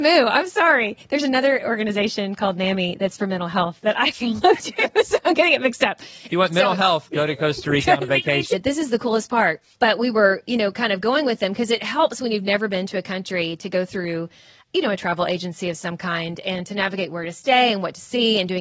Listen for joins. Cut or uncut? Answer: cut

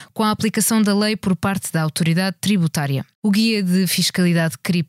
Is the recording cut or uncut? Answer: cut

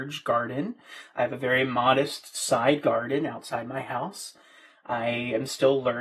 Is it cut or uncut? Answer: uncut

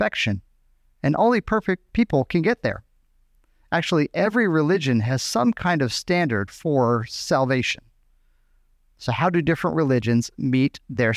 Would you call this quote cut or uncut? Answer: uncut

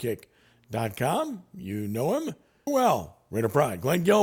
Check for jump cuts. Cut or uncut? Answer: cut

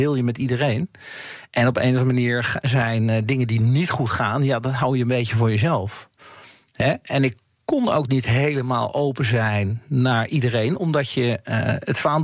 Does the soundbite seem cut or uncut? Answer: uncut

